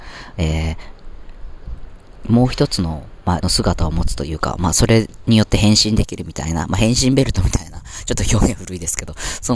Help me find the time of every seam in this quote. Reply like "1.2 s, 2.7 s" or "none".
3.4 s